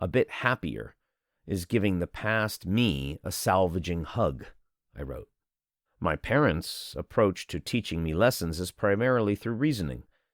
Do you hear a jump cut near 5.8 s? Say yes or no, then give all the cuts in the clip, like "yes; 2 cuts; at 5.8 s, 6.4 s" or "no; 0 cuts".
yes; 1 cut; at 5.8 s